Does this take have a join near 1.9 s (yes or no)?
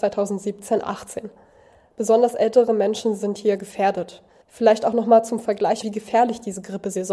no